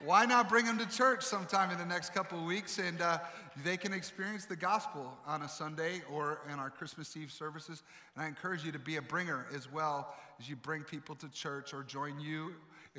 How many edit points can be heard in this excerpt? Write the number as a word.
zero